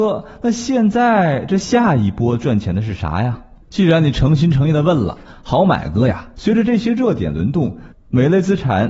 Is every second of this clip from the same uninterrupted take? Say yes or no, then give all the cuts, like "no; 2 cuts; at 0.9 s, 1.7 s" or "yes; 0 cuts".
no; 2 cuts; at 6.3 s, 7.9 s